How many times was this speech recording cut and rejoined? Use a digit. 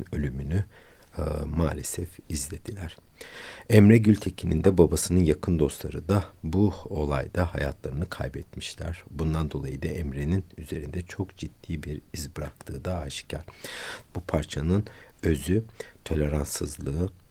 1